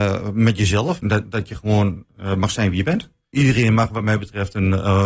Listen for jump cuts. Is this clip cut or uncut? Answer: cut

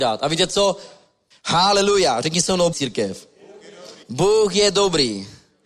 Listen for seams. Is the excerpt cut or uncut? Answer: cut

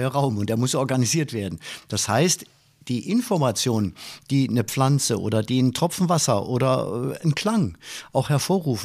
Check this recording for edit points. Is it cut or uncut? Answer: uncut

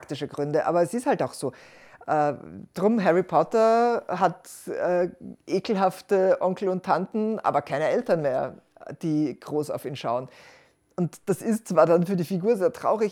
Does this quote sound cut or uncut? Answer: uncut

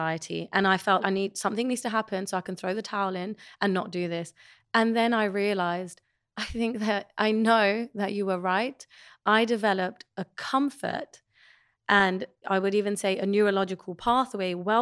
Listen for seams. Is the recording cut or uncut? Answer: cut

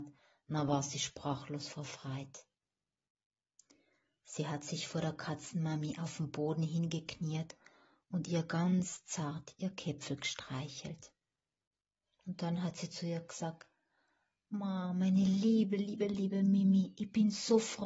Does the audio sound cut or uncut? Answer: uncut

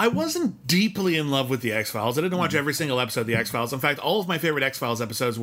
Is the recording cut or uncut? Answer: uncut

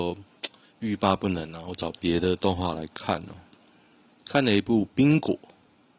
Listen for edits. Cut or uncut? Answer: uncut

